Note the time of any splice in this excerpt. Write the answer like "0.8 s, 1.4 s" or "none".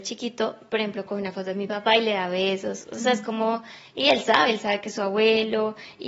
none